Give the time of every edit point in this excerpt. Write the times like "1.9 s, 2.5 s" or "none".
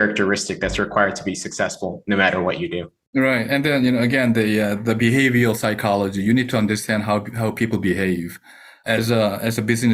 none